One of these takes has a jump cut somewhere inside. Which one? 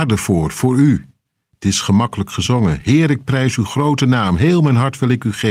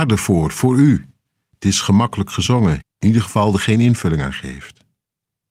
second; 1 cut; at 2.8 s

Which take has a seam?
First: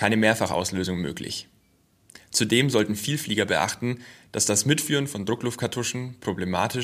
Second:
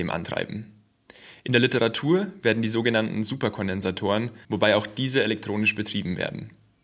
second; 1 cut; at 4.4 s

